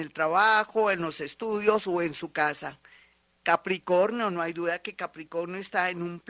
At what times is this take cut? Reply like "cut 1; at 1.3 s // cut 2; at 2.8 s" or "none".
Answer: none